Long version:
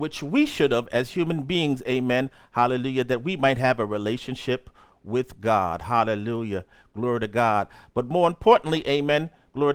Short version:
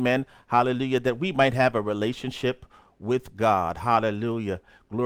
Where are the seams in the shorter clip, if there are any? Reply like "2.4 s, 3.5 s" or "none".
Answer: none